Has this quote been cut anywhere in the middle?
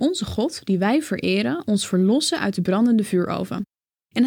no; 0 cuts

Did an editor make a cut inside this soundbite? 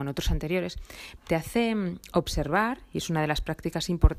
yes; 1 cut; at 1.2 s

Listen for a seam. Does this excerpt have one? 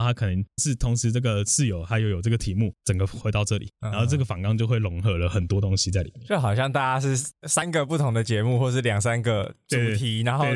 no; 0 cuts

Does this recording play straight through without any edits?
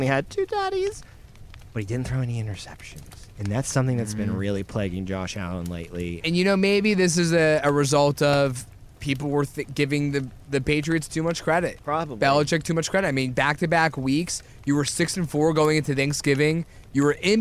no; 1 cut; at 6.2 s

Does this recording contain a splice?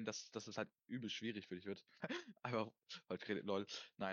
yes; 1 cut; at 2.0 s

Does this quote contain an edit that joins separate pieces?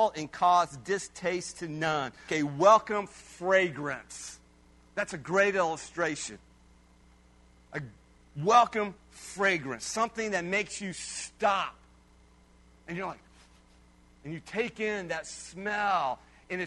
yes; 1 cut; at 2.3 s

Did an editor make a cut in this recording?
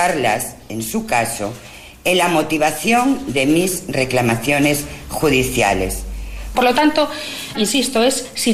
yes; 2 cuts; at 6.5 s, 7.5 s

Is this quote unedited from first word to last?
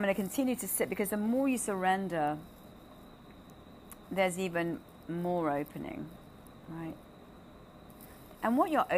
yes; 0 cuts

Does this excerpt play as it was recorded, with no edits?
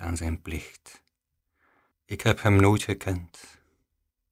no; 1 cut; at 1.9 s

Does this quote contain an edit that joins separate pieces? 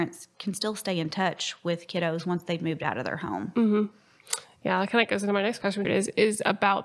yes; 1 cut; at 5.8 s

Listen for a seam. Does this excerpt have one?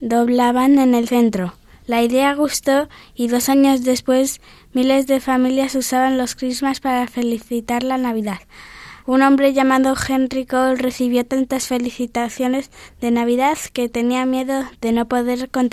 yes; 2 cuts; at 1.8 s, 9.0 s

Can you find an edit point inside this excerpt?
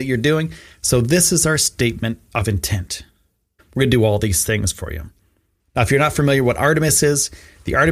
yes; 2 cuts; at 3.6 s, 5.6 s

